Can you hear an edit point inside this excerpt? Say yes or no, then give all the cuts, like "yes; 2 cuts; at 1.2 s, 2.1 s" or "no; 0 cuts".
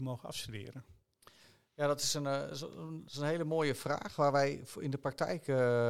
no; 0 cuts